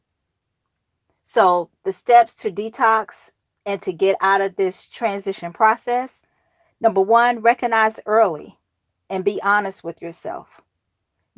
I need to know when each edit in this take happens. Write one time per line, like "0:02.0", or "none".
none